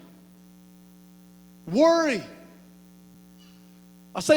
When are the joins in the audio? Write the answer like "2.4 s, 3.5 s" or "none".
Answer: none